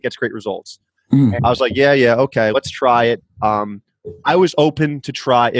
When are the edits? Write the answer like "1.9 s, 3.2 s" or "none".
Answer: 1.4 s, 2.5 s